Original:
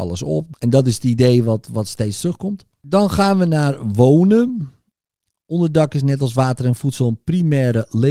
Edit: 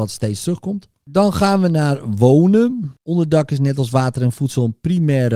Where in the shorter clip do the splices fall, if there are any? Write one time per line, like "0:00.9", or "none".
0:03.0